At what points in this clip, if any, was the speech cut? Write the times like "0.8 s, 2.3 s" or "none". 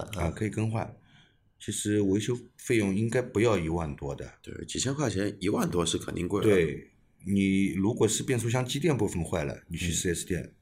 none